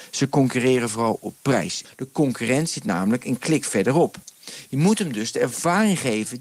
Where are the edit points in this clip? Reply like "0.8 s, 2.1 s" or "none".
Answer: 1.8 s